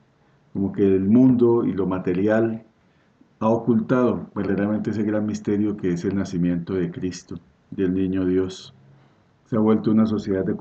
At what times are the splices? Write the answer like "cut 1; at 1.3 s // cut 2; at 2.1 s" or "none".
none